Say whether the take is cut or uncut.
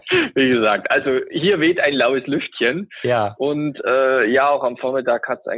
uncut